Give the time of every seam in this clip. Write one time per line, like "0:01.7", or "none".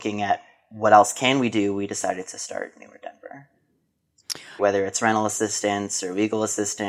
0:04.6